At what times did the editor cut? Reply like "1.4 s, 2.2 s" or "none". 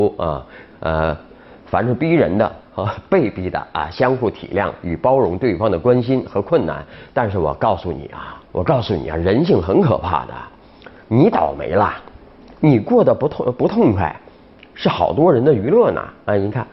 8.5 s